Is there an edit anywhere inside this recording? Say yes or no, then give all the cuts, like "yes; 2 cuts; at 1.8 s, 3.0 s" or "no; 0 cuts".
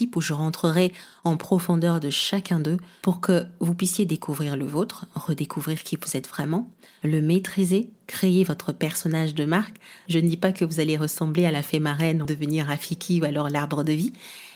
yes; 1 cut; at 12.2 s